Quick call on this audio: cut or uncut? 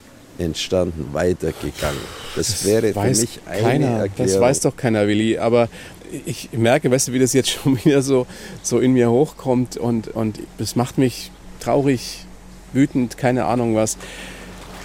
uncut